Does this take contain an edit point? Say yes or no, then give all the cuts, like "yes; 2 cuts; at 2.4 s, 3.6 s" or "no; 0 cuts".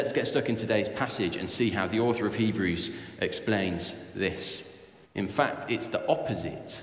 yes; 1 cut; at 5.1 s